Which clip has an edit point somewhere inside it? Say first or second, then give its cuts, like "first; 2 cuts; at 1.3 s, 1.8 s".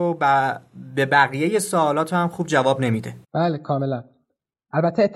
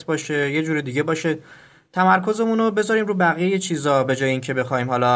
first; 1 cut; at 3.2 s